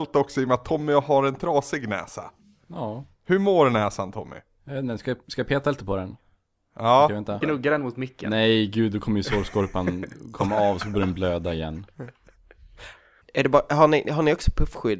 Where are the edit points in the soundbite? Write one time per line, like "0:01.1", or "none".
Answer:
0:07.4
0:13.2